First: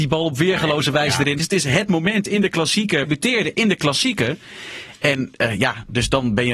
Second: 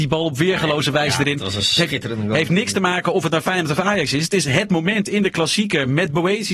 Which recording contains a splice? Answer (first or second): first